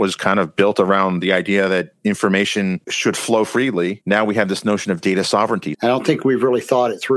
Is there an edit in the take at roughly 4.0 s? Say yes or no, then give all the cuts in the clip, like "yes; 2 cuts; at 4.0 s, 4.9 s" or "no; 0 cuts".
no; 1 cut; at 5.7 s